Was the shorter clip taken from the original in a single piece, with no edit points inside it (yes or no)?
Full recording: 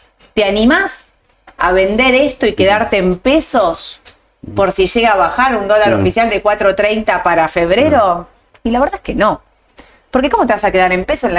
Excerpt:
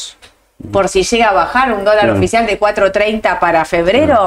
yes